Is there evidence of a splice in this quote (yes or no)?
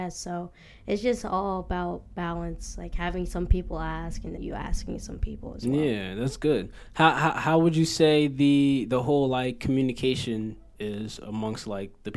yes